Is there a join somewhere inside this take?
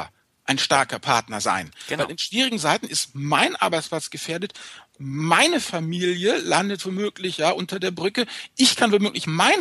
no; 0 cuts

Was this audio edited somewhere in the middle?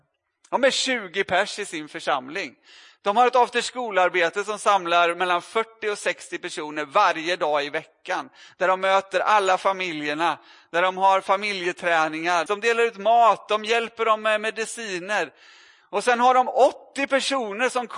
yes; 1 cut; at 12.5 s

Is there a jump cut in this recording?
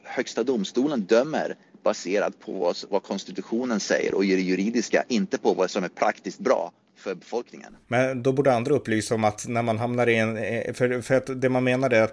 yes; 1 cut; at 7.8 s

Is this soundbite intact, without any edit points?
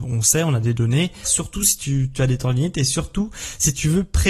no; 1 cut; at 1.2 s

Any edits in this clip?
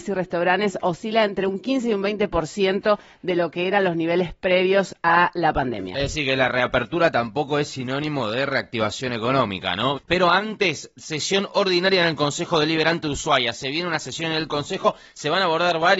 yes; 1 cut; at 10.0 s

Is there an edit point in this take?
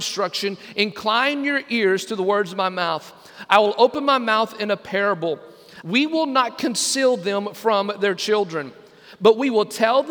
yes; 1 cut; at 5.8 s

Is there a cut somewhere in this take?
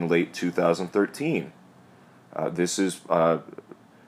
no; 0 cuts

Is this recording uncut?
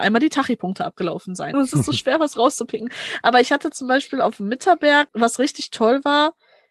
no; 2 cuts; at 1.5 s, 5.1 s

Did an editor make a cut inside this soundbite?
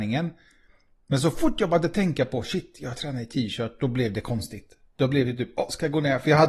no; 0 cuts

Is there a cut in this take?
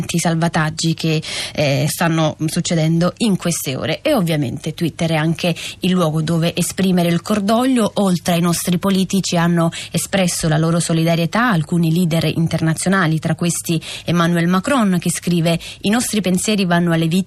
yes; 1 cut; at 1.9 s

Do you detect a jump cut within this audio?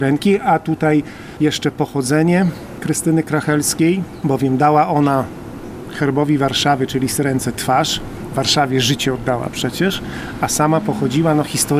no; 0 cuts

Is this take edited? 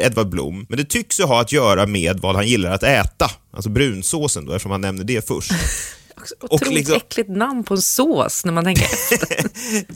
yes; 1 cut; at 6.1 s

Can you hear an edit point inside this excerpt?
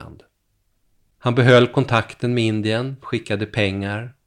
yes; 1 cut; at 3.0 s

